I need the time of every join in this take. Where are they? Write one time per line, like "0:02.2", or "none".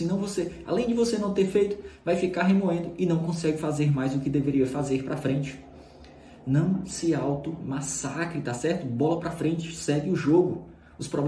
none